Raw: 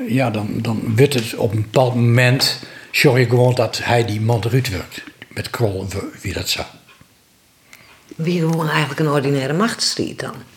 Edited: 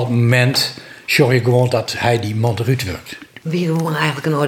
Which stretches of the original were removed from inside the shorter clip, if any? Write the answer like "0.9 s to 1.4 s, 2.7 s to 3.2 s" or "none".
5.3 s to 8.2 s